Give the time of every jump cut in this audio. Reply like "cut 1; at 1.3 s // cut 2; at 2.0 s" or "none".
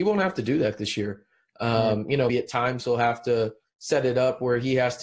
cut 1; at 2.3 s